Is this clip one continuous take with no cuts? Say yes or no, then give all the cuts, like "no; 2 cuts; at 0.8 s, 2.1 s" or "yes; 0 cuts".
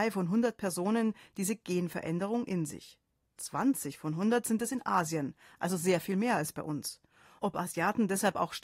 yes; 0 cuts